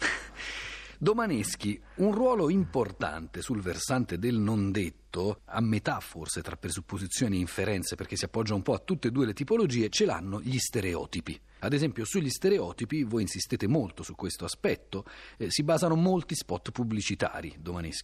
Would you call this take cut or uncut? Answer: uncut